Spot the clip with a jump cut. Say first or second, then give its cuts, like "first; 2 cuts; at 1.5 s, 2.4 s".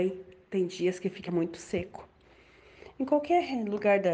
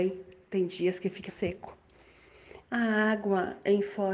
second; 2 cuts; at 1.3 s, 2.6 s